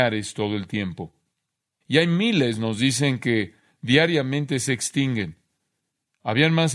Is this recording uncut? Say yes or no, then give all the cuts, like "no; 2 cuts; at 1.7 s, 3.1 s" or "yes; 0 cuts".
no; 1 cut; at 1.8 s